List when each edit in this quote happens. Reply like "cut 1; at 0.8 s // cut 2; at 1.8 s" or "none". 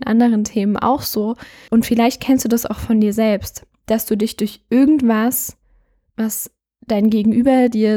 cut 1; at 1.7 s